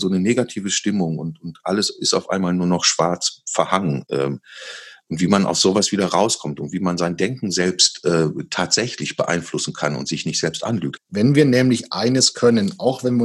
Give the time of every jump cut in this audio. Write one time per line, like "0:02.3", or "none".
0:11.0